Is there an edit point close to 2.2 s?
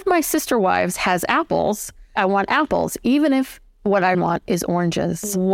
yes; 2 cuts; at 2.2 s, 4.1 s

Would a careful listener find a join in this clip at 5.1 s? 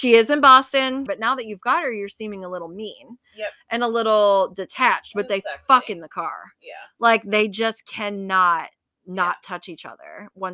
no; 1 cut; at 1.1 s

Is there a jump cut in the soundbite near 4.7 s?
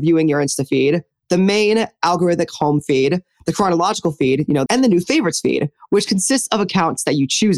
yes; 1 cut; at 4.7 s

